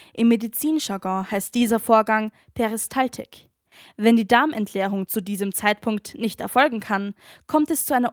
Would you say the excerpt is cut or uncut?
uncut